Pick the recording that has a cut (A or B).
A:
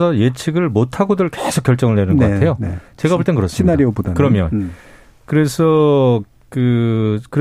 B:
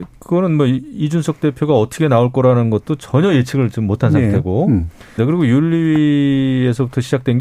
B